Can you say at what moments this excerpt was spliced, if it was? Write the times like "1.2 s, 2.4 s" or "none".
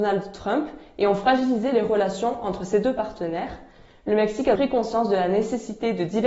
4.6 s